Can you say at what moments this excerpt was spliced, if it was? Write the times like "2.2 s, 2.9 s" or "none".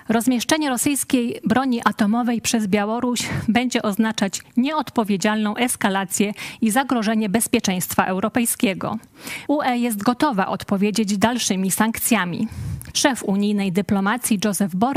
9.5 s, 12.9 s